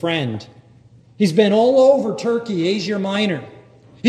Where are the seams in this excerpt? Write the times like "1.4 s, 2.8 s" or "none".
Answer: 1.0 s